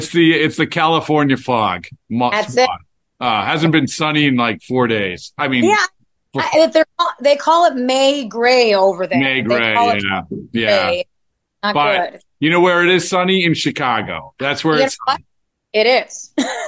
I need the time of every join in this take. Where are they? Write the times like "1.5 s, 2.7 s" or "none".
none